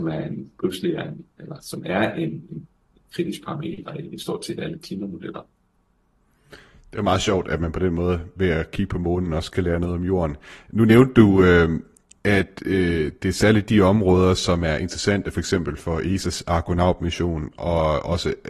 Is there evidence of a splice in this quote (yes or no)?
no